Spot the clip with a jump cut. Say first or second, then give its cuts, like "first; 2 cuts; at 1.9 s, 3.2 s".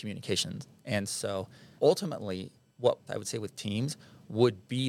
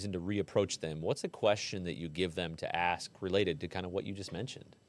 first; 2 cuts; at 1.8 s, 3.1 s